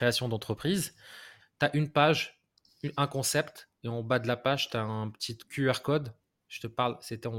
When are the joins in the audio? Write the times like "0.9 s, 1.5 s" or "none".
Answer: 1.4 s